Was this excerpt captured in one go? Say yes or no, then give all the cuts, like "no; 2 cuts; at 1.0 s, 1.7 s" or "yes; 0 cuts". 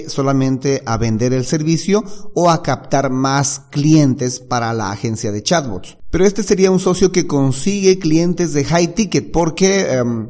yes; 0 cuts